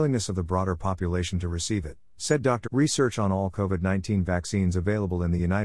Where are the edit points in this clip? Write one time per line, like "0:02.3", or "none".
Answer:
0:02.6